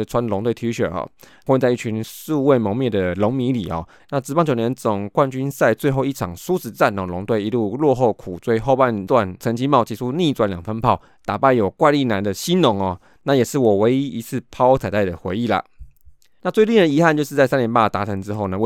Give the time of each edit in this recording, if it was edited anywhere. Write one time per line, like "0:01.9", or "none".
0:04.0